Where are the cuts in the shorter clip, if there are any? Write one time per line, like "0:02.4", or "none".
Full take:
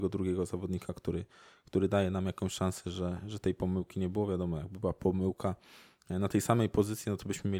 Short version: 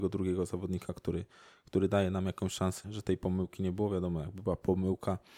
0:02.8

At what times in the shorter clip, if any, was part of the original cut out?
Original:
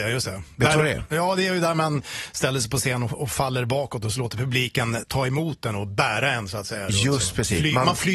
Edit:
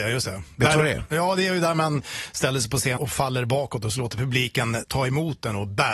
0:03.0

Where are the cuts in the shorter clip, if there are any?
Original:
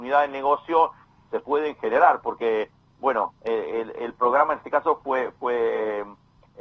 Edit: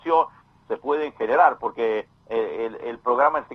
0:02.2

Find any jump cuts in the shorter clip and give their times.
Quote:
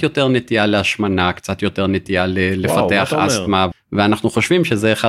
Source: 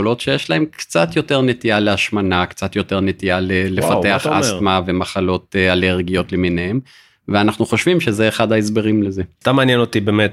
0:03.7

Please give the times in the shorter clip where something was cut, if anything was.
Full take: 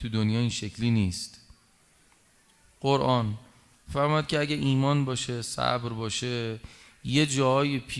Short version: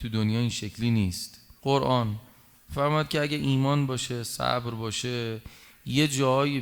0:01.6

